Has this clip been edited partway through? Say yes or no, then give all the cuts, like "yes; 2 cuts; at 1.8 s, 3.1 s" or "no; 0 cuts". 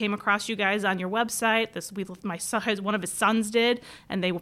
no; 0 cuts